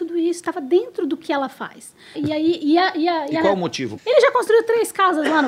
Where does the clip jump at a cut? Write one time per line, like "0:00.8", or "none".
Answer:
0:02.1
0:04.0